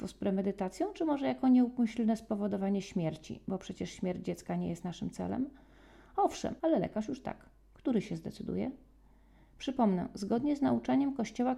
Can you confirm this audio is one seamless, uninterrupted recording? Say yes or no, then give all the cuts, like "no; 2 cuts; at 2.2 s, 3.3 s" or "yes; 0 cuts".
no; 1 cut; at 6.6 s